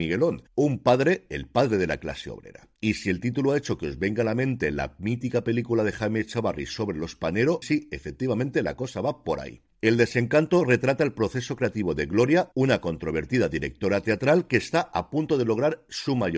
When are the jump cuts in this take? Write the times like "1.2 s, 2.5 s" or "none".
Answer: 2.8 s, 7.6 s